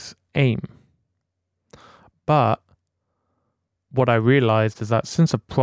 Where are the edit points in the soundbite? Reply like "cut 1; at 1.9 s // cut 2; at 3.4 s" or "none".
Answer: cut 1; at 2.1 s